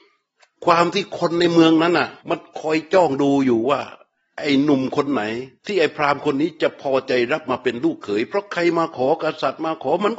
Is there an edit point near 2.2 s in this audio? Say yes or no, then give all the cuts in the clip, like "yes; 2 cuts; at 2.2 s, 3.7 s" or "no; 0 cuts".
yes; 2 cuts; at 2.2 s, 5.6 s